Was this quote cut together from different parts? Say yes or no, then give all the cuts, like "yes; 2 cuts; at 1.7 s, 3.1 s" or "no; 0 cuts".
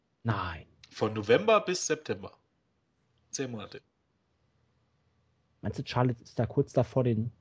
no; 0 cuts